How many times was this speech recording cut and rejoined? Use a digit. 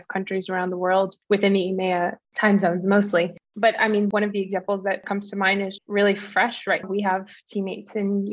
2